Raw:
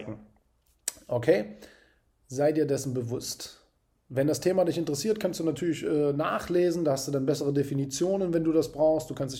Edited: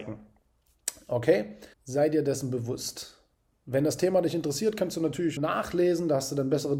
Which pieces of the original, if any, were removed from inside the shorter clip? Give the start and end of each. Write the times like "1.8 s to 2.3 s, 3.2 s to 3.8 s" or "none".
1.7 s to 2.2 s, 5.8 s to 6.1 s